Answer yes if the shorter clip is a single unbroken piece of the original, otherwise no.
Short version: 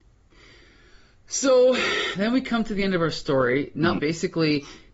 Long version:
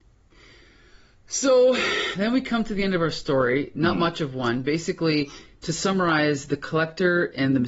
no